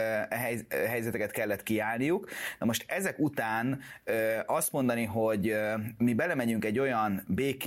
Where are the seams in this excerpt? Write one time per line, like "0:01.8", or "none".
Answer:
none